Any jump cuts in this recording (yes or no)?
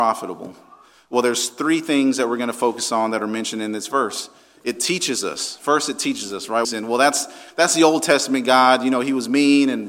yes